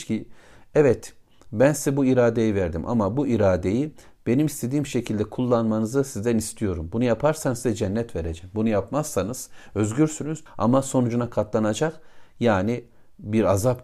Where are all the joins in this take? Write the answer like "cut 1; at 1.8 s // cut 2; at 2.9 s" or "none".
cut 1; at 10.5 s